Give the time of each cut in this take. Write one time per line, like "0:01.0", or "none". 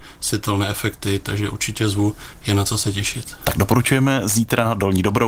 none